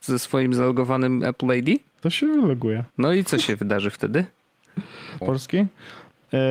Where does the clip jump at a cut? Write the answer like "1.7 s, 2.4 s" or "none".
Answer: 2.9 s, 5.2 s